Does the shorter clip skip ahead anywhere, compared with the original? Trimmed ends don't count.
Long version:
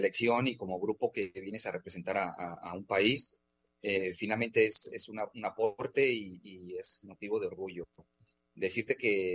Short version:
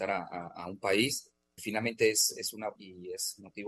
yes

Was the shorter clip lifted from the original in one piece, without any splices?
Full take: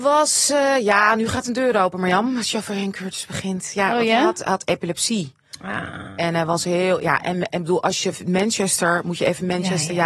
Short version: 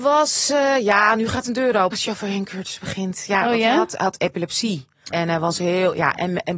no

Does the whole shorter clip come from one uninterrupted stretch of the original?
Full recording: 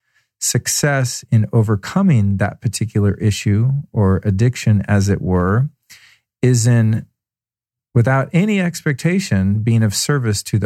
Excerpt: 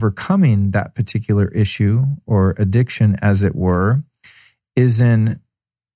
yes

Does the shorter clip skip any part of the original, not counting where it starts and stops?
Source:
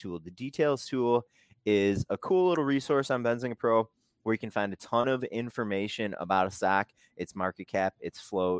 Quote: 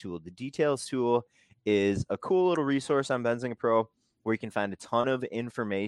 no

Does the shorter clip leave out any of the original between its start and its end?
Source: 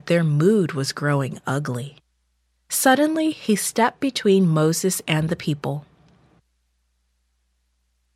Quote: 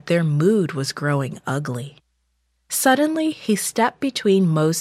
no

